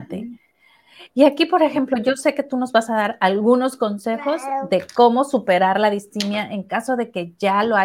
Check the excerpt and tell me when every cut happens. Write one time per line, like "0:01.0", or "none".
none